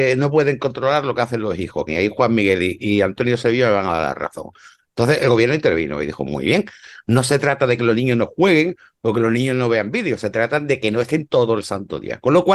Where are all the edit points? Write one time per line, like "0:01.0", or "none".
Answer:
0:01.9